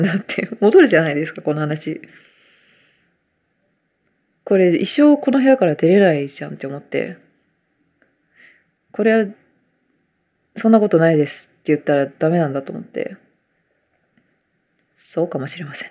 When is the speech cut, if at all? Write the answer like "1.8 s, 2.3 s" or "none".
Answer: none